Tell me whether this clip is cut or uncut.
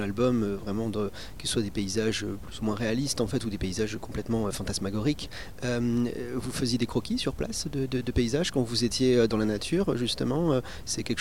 cut